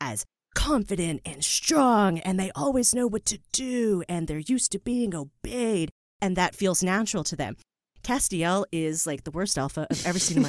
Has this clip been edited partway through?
no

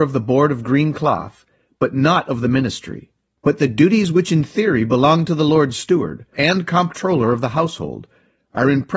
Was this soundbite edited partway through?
yes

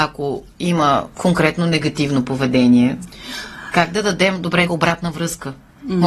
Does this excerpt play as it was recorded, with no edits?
no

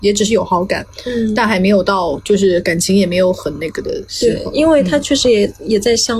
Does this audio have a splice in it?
no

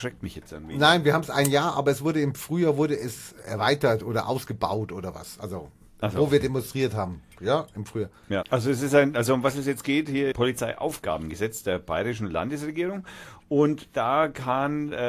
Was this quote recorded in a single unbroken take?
no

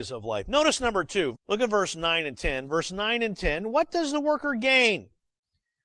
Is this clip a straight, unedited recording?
no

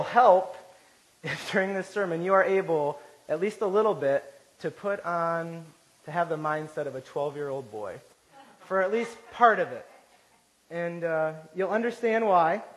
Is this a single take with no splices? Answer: yes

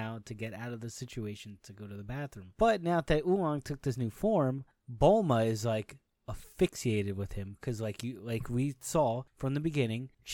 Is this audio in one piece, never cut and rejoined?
yes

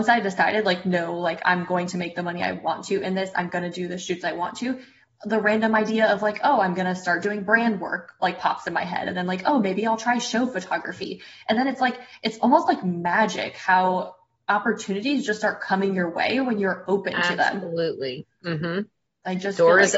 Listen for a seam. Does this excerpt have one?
no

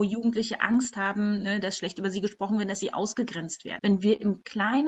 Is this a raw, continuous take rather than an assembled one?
no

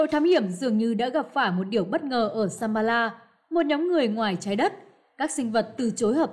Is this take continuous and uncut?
yes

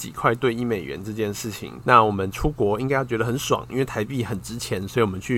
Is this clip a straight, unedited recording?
no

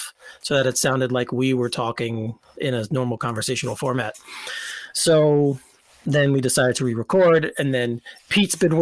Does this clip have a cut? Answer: no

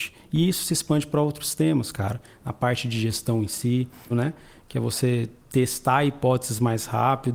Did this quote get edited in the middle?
yes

